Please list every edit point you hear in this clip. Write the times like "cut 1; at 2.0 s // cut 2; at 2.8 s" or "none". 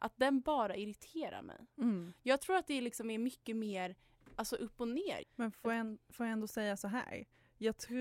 cut 1; at 5.2 s